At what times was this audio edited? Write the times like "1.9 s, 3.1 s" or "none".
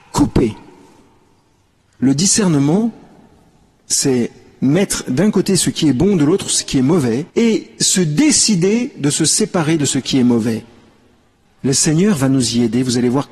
7.3 s, 11.5 s